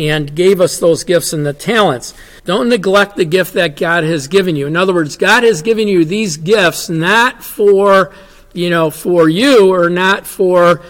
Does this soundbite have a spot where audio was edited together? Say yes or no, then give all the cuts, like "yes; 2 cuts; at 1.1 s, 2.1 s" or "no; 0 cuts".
yes; 1 cut; at 2.4 s